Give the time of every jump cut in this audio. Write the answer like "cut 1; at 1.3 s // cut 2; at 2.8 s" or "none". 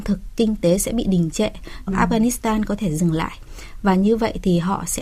cut 1; at 1.9 s